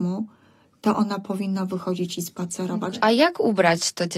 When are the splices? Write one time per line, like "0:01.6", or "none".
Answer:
0:03.0